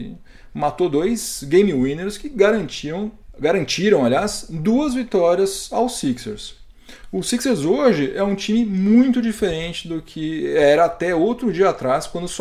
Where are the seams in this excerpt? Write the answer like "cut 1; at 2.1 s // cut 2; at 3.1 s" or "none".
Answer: none